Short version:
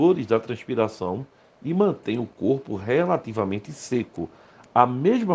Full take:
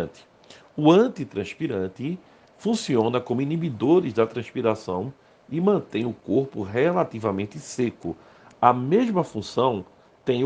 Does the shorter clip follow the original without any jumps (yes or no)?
yes